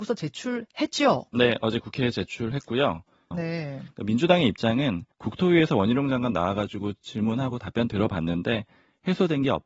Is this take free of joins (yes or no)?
no